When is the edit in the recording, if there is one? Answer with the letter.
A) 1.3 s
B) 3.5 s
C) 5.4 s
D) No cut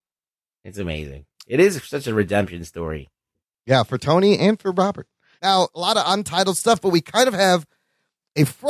C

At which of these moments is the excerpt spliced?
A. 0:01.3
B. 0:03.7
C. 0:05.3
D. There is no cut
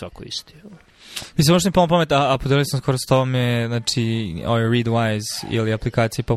A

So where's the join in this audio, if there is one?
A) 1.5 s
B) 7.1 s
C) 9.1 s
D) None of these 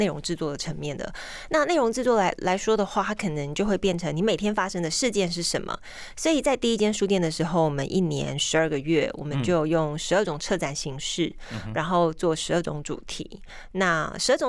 D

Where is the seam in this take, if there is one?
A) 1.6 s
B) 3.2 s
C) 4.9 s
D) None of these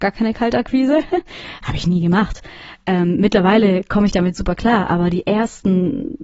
A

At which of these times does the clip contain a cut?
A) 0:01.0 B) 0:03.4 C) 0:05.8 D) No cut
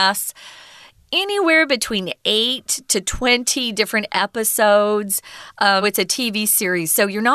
C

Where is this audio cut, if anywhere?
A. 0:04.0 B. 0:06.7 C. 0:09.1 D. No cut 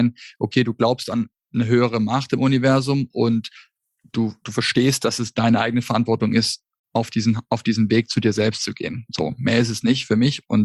D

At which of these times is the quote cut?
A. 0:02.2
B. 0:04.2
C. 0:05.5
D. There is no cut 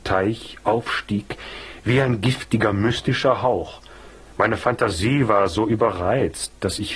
B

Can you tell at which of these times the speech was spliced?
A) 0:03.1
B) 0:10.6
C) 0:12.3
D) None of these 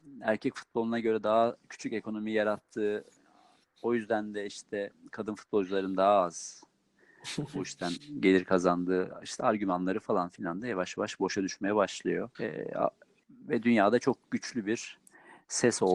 C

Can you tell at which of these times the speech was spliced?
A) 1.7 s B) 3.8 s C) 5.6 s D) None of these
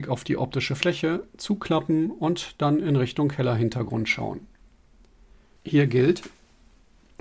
C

